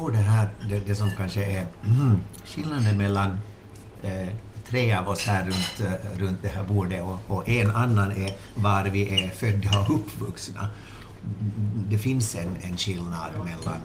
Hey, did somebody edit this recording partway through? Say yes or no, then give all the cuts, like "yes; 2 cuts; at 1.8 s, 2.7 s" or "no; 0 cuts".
no; 0 cuts